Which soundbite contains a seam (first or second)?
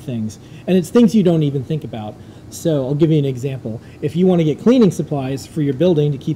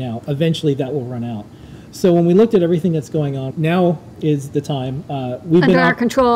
second